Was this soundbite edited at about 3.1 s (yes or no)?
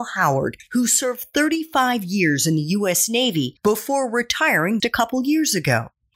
no